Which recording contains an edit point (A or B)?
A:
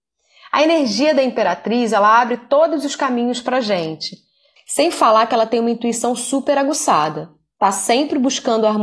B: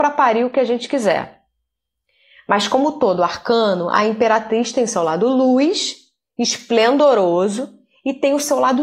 A